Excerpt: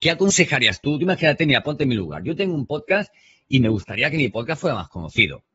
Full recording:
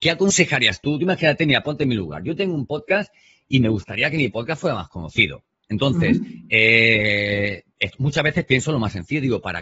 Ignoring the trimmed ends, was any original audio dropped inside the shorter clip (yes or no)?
no